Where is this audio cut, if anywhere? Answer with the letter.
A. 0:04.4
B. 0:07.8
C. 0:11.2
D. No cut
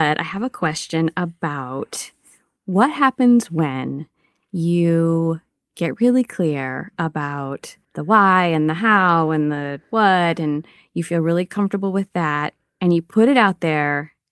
B